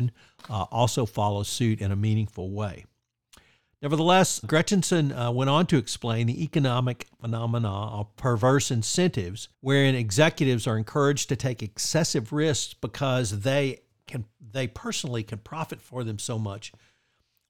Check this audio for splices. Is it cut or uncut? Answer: cut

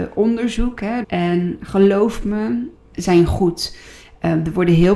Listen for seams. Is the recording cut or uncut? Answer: cut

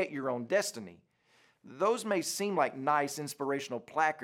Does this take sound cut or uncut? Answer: uncut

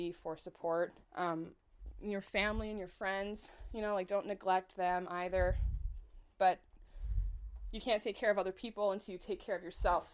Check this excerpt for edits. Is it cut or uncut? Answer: cut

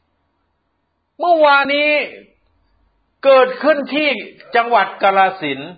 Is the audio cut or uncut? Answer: cut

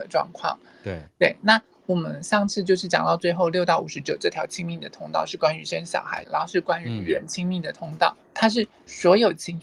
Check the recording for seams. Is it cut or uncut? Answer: cut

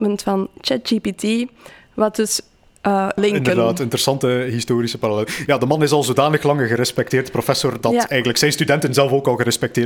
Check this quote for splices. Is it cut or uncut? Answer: cut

